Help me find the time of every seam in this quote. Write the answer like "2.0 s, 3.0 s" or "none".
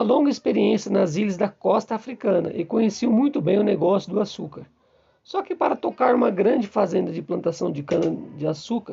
none